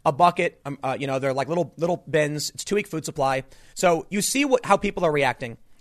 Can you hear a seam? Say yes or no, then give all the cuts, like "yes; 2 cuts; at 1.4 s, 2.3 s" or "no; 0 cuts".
yes; 1 cut; at 3.7 s